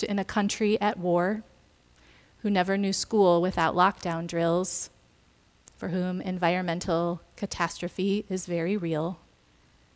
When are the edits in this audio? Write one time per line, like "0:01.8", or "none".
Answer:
none